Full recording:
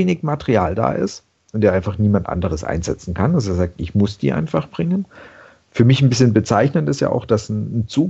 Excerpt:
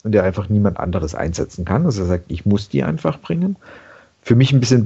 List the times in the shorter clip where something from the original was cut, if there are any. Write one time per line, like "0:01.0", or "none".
none